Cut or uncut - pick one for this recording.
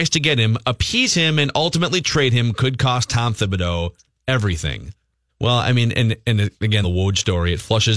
cut